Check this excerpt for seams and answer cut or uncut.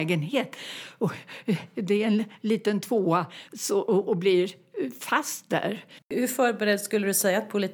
cut